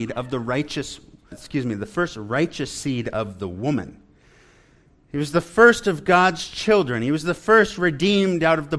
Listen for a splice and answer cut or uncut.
cut